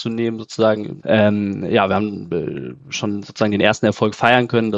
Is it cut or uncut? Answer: cut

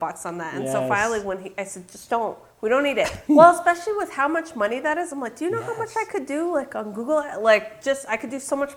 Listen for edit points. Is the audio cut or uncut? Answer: cut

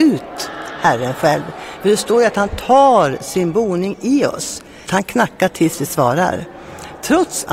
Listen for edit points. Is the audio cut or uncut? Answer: cut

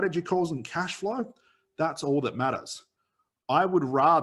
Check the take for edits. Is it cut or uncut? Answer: uncut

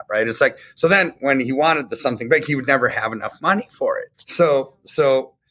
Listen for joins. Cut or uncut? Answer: cut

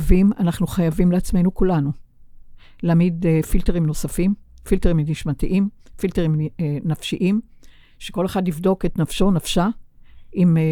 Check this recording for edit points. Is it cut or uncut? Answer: uncut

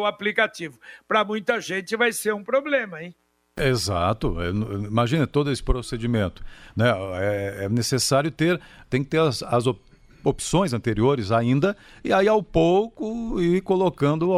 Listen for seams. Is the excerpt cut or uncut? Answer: cut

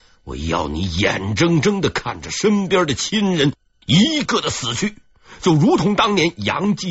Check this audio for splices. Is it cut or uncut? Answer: cut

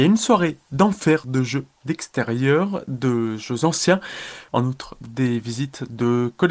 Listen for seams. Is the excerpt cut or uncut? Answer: cut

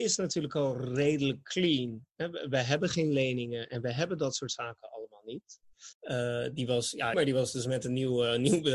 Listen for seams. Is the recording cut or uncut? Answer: cut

